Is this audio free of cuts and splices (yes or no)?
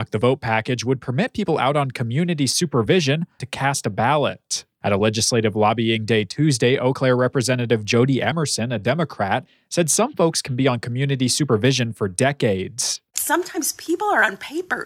no